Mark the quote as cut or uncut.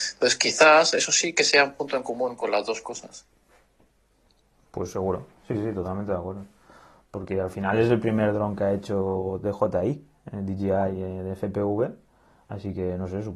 uncut